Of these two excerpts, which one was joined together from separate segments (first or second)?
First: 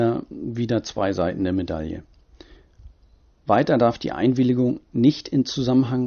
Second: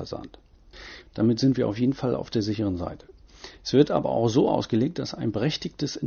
second